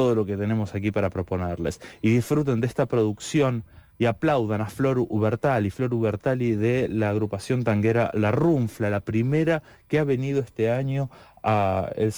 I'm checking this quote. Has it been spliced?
no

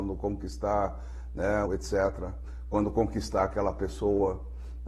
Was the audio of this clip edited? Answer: yes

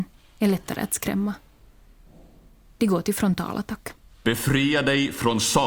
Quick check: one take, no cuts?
yes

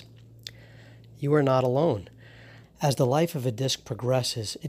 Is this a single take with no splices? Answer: no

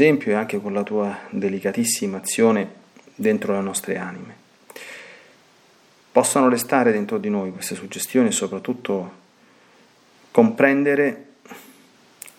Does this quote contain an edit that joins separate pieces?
no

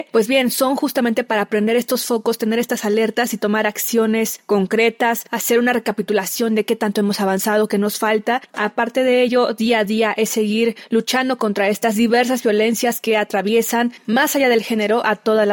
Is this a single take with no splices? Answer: no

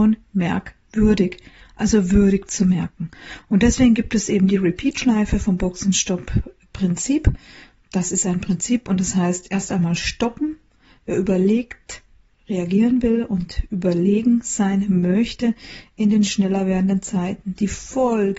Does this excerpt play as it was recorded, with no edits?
yes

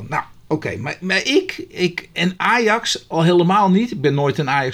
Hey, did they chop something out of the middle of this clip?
no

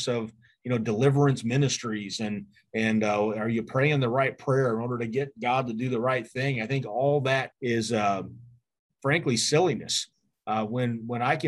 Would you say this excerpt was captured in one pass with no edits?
no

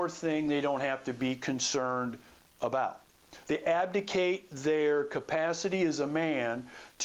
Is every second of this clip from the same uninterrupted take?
no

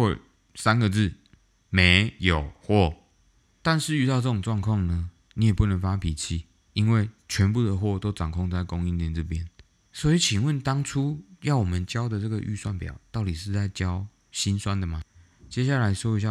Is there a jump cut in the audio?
no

